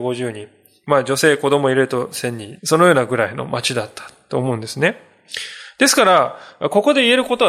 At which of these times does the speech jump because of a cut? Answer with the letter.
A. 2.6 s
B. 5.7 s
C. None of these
A